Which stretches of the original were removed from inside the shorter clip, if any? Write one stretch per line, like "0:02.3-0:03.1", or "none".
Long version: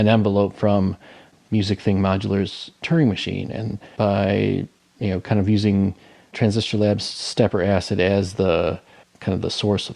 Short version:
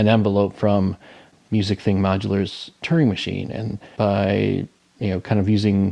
none